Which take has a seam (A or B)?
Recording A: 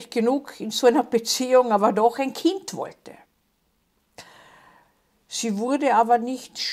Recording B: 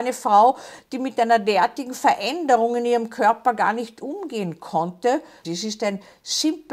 B